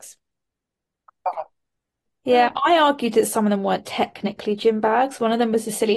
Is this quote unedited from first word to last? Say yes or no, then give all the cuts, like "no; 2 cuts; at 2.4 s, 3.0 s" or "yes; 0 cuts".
yes; 0 cuts